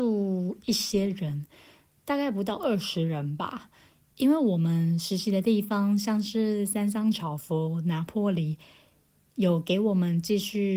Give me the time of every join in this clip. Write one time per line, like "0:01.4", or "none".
none